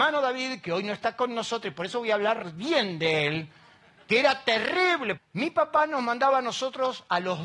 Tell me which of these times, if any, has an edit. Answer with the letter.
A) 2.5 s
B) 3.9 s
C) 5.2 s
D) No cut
C